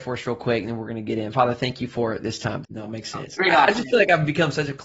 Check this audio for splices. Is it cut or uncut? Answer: cut